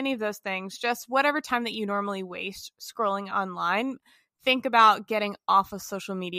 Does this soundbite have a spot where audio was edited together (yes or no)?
no